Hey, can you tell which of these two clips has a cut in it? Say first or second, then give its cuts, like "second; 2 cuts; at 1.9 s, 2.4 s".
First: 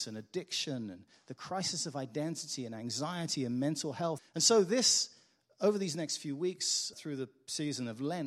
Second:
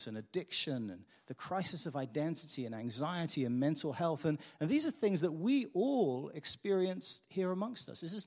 first; 2 cuts; at 4.2 s, 6.9 s